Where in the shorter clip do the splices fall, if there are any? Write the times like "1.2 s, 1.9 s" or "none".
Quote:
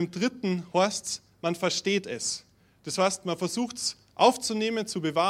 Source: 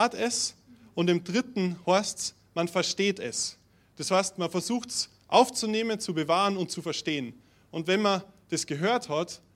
none